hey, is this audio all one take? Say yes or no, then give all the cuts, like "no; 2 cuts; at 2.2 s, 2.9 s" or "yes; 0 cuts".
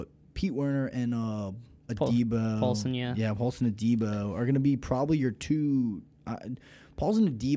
yes; 0 cuts